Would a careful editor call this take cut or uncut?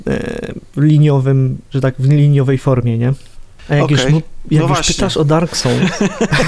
uncut